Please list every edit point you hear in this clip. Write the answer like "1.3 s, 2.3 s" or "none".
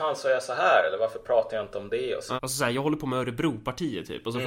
2.4 s